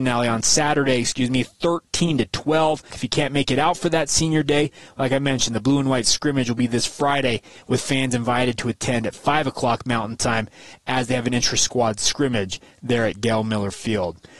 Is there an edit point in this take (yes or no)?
yes